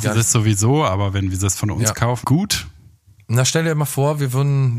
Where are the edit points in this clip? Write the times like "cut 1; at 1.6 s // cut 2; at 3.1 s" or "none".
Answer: cut 1; at 2.2 s